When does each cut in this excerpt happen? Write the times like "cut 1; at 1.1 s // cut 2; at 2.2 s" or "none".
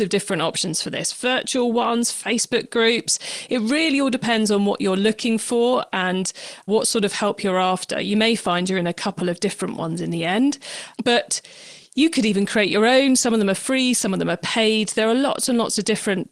cut 1; at 2.1 s